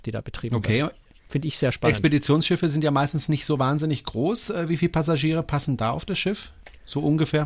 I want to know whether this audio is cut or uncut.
uncut